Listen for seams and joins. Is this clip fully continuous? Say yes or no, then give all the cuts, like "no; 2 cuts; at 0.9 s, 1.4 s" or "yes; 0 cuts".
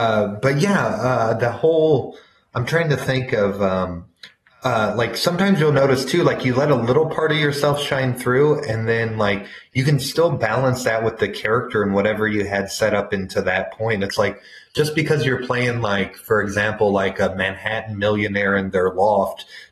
yes; 0 cuts